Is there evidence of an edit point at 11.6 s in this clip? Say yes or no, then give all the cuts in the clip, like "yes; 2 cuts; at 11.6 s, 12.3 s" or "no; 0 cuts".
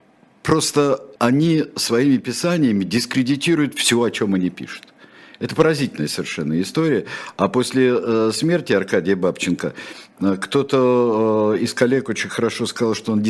no; 1 cut; at 1.2 s